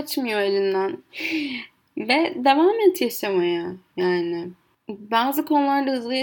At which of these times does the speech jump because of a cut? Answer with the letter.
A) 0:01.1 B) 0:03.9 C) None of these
A